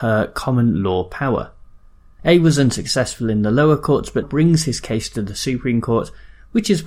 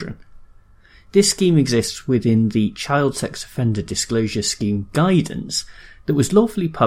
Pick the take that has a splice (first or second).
first